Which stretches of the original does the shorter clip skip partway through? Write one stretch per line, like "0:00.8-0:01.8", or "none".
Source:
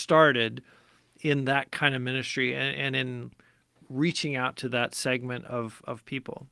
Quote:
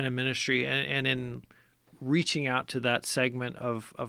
none